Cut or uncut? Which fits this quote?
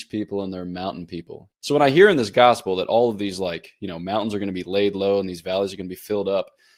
cut